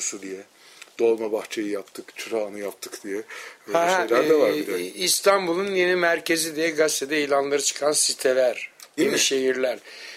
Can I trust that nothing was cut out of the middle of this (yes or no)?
no